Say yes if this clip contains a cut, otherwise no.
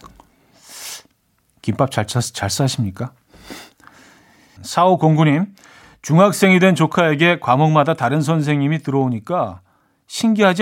yes